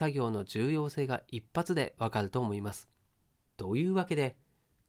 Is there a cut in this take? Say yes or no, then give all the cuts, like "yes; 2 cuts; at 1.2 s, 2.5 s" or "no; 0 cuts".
yes; 1 cut; at 3.5 s